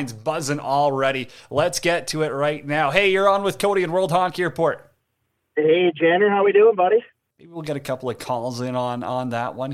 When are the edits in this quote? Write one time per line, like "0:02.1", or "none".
0:07.3